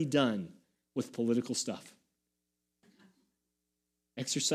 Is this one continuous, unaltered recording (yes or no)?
no